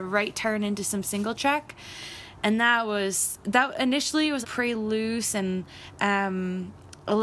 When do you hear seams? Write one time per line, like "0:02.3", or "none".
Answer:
0:04.4